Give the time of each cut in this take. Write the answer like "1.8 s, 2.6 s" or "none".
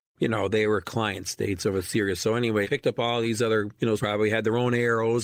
2.6 s, 4.0 s